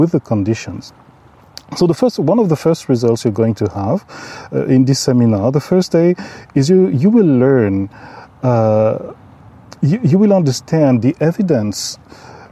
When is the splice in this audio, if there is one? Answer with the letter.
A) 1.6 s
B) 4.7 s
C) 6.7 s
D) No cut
D